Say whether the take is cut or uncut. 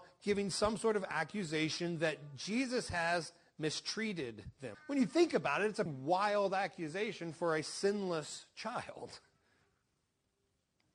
cut